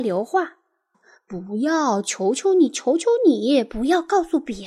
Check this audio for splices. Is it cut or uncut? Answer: cut